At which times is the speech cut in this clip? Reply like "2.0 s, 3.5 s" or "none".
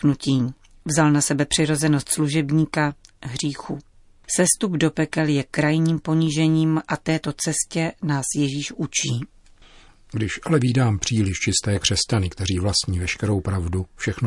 none